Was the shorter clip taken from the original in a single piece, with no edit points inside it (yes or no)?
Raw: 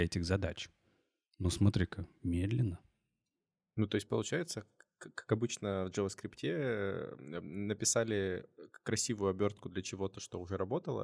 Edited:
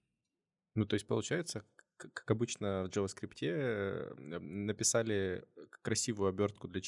yes